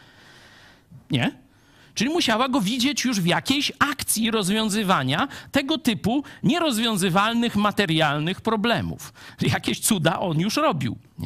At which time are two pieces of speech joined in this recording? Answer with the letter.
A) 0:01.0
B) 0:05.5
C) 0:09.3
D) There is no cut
A